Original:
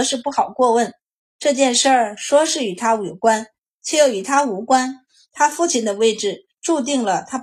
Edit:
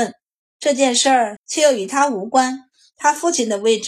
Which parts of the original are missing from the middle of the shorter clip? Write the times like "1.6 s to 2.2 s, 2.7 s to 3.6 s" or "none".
2.2 s to 3.7 s